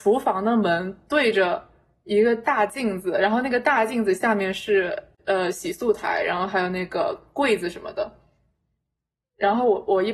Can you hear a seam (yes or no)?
no